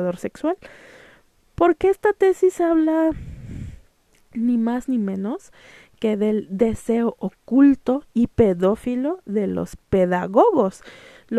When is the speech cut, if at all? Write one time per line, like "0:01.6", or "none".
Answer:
none